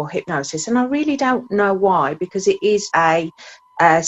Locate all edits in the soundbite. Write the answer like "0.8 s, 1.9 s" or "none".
2.9 s